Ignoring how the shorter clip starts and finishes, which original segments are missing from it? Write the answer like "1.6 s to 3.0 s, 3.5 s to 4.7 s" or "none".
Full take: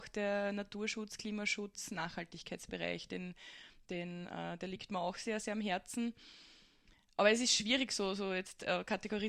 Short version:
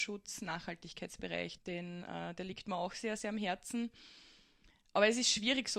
3.1 s to 3.8 s